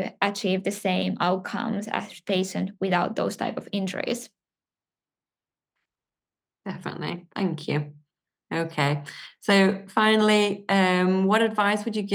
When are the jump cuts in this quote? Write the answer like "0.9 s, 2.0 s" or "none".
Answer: none